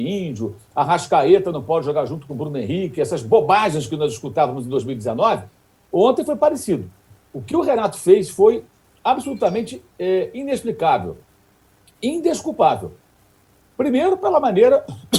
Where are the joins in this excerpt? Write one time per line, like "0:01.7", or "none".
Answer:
none

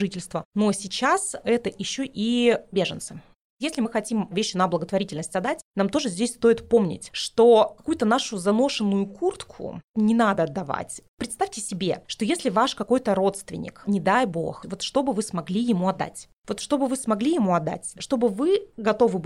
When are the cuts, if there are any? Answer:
0:14.6

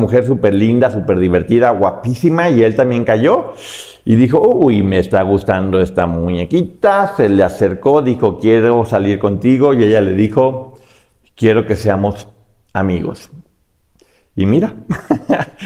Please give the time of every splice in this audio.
none

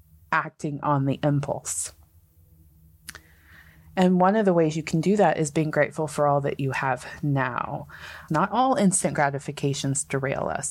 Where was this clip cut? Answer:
0:08.3

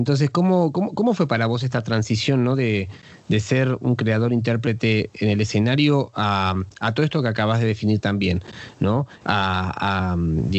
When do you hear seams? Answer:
0:09.2

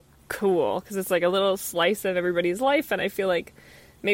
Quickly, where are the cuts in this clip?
none

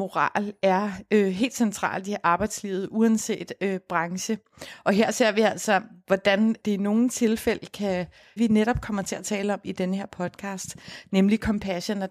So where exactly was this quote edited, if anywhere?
0:08.4

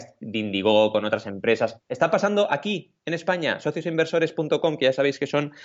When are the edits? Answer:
none

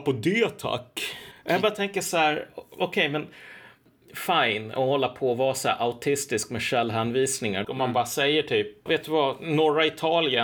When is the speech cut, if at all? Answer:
0:01.3
0:07.6
0:08.9

